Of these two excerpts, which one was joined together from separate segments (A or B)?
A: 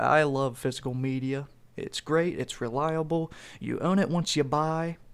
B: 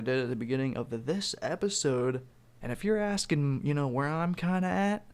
B